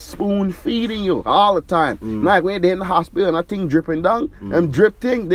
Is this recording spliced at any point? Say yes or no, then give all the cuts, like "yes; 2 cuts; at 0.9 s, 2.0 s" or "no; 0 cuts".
no; 0 cuts